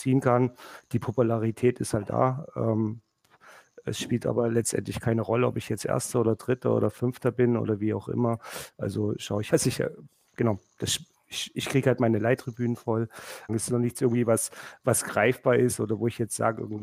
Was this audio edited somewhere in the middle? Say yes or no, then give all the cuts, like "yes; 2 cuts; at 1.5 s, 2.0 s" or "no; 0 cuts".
yes; 2 cuts; at 9.5 s, 13.5 s